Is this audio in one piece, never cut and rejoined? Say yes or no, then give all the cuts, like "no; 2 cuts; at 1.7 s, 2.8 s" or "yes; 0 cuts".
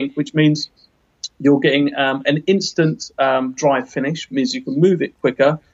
yes; 0 cuts